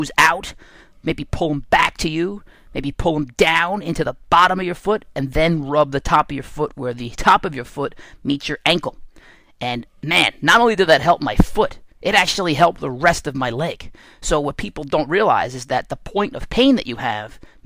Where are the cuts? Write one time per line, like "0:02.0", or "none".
none